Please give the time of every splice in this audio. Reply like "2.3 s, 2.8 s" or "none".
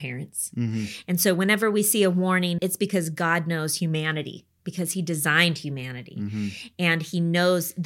2.6 s